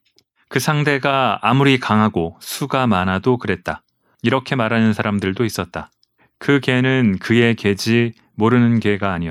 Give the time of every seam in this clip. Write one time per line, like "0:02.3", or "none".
0:04.1